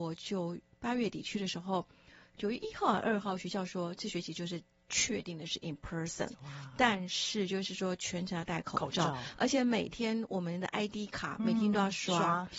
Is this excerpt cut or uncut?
uncut